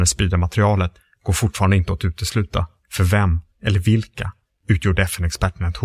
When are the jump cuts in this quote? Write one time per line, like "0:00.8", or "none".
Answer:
0:02.8